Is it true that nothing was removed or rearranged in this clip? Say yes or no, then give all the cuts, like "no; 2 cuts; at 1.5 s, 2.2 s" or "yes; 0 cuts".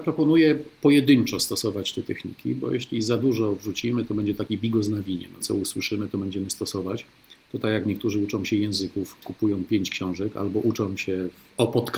no; 1 cut; at 5.4 s